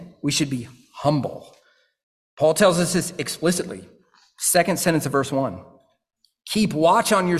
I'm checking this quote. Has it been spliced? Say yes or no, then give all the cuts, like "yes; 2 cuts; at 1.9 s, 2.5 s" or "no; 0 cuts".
no; 0 cuts